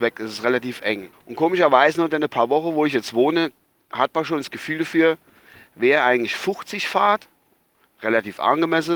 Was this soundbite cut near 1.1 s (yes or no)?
yes